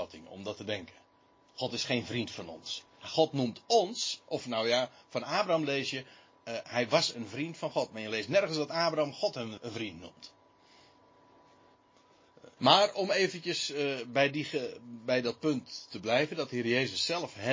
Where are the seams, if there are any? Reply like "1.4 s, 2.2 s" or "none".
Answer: 9.6 s, 12.6 s

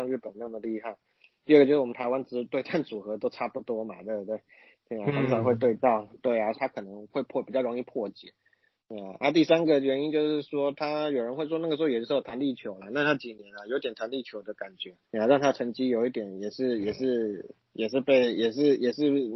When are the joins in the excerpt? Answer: 6.5 s, 15.0 s

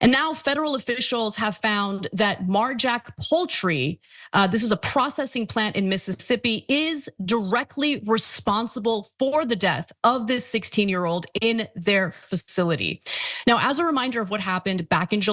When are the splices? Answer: none

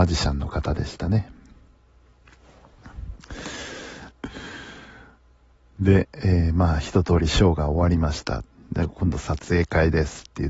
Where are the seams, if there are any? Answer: 4.1 s

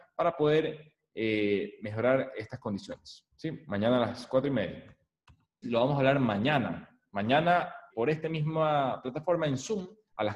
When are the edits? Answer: 3.3 s, 5.6 s, 7.9 s

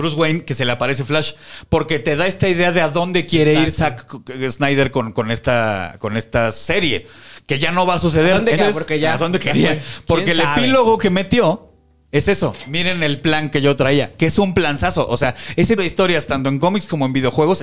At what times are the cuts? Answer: 8.6 s, 15.8 s

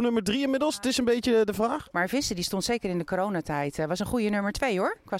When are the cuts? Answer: 1.9 s

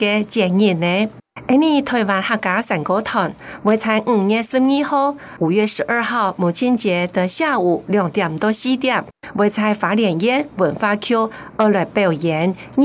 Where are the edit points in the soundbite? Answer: none

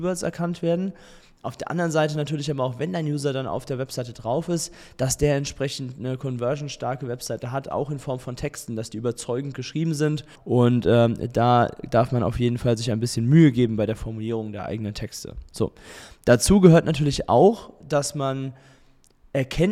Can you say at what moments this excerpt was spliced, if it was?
10.3 s

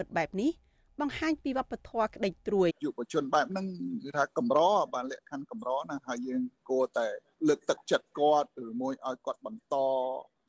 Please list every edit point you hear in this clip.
2.7 s

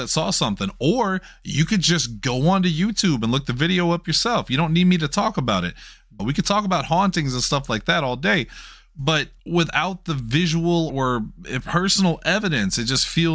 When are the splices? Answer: 6.2 s, 9.4 s, 10.9 s

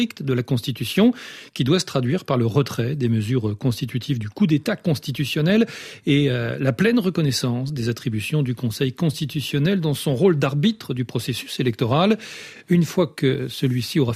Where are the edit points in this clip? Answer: none

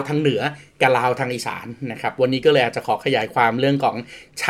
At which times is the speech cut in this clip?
none

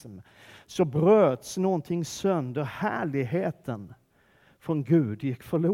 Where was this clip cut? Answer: none

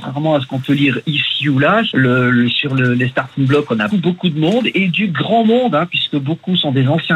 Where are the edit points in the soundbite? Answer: 1.9 s, 3.9 s

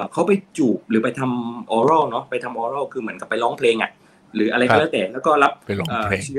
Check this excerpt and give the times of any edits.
1.7 s

